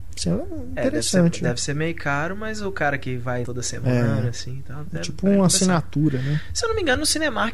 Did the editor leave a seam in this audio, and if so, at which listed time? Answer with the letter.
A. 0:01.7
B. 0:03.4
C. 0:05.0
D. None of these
B